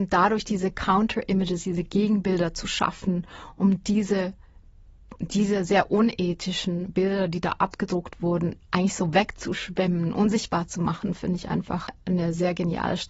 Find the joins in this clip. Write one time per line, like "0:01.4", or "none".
none